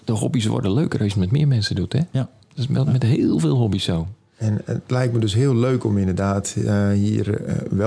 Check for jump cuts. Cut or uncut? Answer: uncut